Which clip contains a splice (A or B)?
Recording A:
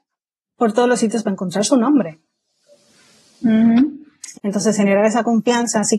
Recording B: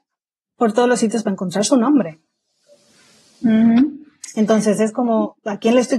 A